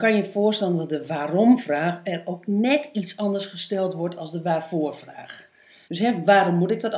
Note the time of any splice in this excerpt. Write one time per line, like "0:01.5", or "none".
0:05.8